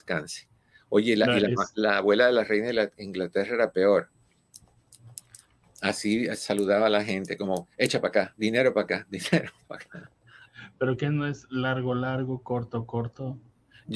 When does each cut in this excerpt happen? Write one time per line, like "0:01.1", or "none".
none